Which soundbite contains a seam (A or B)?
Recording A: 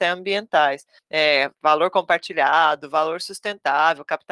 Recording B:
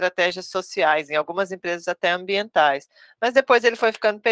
A